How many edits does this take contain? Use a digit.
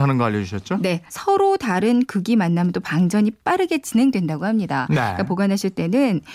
1